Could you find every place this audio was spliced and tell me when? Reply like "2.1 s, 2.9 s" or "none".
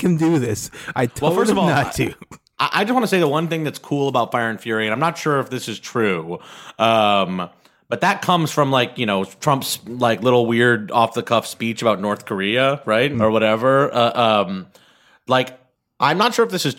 13.1 s